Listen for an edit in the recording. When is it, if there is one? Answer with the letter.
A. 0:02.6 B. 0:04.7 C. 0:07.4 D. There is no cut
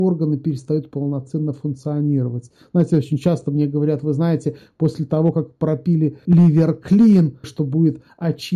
C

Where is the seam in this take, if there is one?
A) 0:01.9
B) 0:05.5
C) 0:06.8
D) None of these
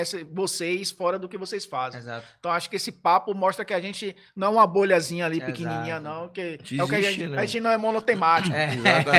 D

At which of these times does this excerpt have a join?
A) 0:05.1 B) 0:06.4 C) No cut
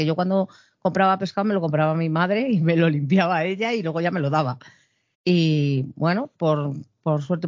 A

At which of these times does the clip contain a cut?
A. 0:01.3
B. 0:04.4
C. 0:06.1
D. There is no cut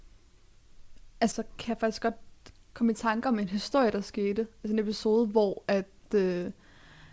A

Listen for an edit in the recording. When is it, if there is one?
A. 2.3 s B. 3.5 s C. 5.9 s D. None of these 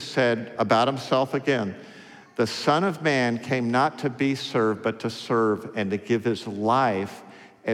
D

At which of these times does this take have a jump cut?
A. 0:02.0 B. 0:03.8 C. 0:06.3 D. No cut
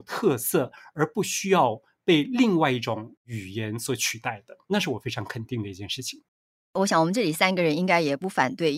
D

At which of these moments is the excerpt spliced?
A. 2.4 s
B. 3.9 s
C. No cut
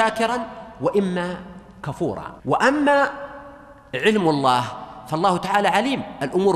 A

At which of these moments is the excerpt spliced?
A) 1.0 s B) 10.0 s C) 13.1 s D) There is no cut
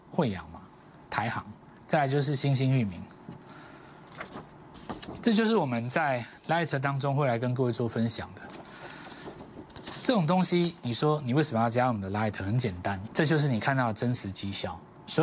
C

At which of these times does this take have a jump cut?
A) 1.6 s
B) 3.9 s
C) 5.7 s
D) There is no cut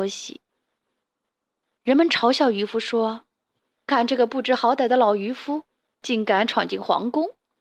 B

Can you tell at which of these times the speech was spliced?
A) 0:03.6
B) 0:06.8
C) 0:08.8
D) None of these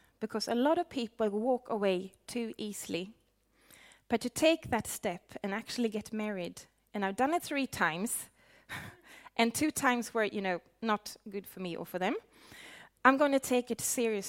D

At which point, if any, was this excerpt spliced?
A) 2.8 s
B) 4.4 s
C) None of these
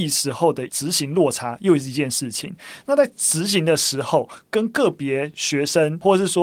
C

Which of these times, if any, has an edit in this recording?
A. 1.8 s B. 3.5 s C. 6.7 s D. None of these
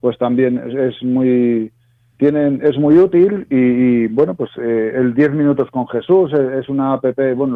D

